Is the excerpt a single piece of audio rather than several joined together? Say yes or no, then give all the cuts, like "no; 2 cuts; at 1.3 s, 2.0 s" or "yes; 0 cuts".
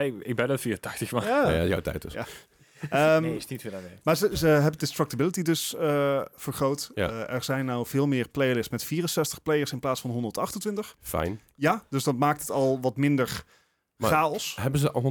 yes; 0 cuts